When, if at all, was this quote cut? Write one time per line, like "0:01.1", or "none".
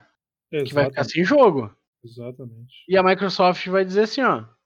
none